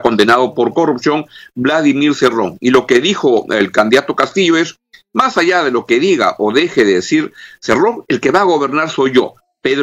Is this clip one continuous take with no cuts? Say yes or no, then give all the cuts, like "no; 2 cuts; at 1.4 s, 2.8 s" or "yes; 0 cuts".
yes; 0 cuts